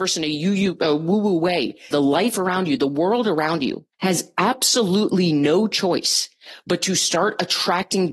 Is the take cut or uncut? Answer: cut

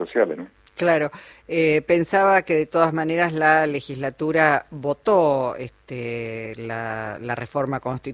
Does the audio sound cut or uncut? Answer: uncut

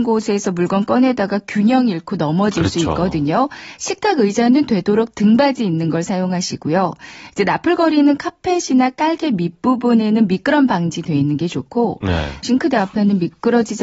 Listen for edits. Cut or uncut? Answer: cut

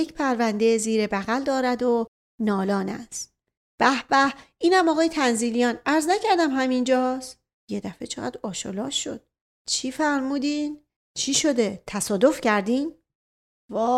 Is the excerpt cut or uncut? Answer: cut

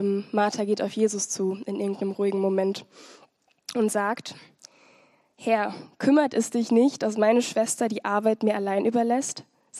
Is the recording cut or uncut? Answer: uncut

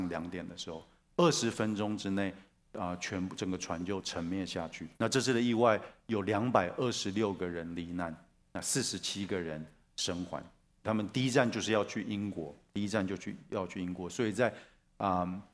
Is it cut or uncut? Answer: cut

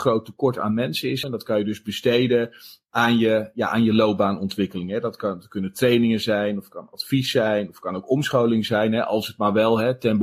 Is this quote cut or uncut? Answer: cut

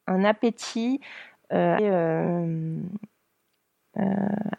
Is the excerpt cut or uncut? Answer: cut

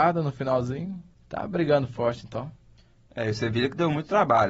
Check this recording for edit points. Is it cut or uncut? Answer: uncut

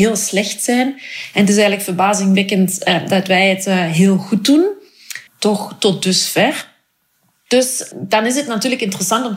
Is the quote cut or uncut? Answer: cut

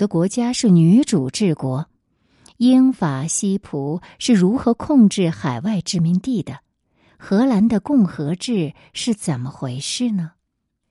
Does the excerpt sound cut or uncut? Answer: uncut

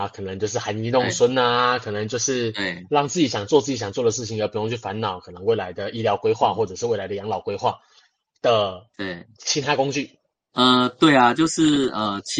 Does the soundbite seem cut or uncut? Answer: cut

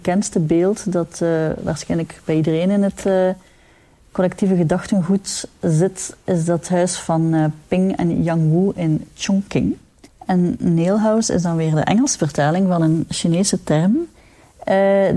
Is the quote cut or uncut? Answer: cut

